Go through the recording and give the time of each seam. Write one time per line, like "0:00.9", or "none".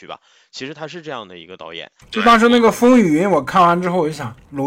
none